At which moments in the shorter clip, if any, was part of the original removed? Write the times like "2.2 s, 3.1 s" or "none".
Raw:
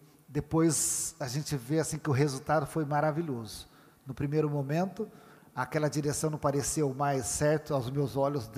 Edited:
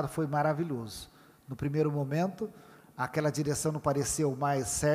none